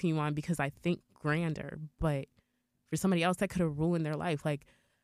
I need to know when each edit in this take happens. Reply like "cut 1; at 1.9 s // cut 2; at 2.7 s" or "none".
none